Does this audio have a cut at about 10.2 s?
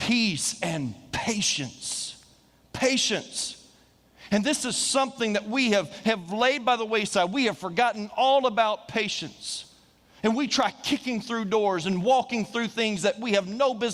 yes; 1 cut; at 10.2 s

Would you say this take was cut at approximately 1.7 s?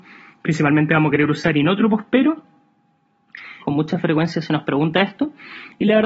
no; 1 cut; at 3.6 s

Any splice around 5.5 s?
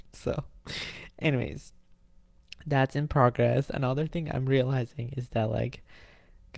no; 0 cuts

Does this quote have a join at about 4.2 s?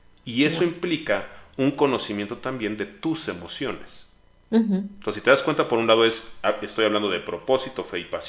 no; 0 cuts

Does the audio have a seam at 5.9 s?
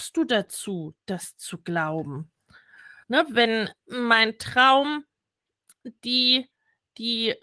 no; 1 cut; at 3.0 s

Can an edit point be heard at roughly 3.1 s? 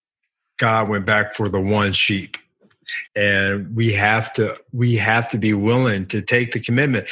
yes; 1 cut; at 3.1 s

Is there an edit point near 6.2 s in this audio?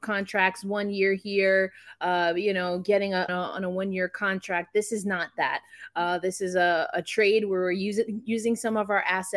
no; 1 cut; at 3.3 s

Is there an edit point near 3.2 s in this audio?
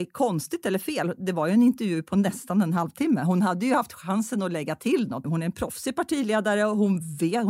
no; 1 cut; at 5.2 s

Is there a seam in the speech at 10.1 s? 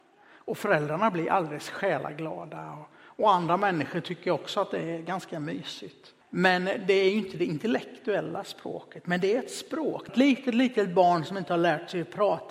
yes; 2 cuts; at 6.2 s, 10.1 s

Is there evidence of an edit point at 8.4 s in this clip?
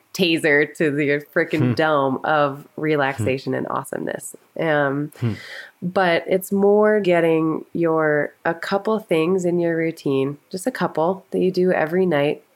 yes; 2 cuts; at 7.0 s, 8.4 s

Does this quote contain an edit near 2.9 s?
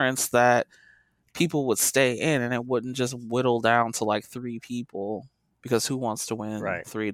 no; 1 cut; at 5.6 s

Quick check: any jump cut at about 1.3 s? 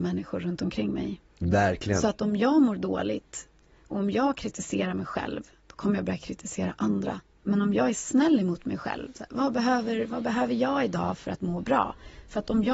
yes; 1 cut; at 1.3 s

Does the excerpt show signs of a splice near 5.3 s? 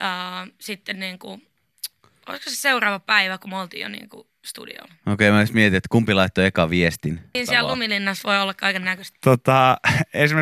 no; 2 cuts; at 7.3 s, 9.1 s

